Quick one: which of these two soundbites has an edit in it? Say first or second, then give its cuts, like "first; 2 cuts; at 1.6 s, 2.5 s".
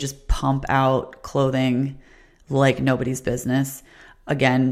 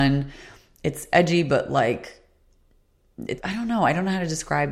second; 1 cut; at 3.4 s